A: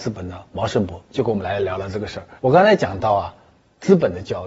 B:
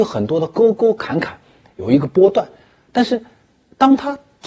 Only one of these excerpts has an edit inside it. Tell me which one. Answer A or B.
A